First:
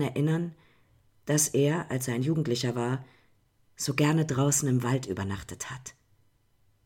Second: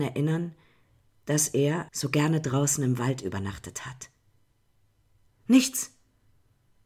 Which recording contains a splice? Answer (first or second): second